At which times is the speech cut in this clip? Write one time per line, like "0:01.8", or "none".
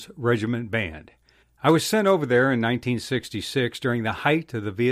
0:01.4